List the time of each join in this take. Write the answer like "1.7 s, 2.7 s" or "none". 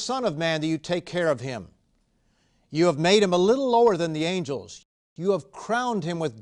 none